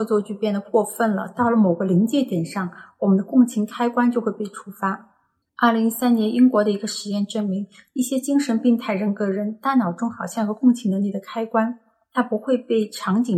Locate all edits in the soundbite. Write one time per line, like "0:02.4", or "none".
0:05.4